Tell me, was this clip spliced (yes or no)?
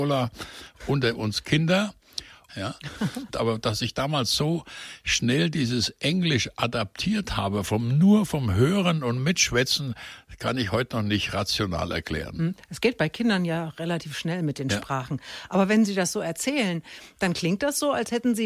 yes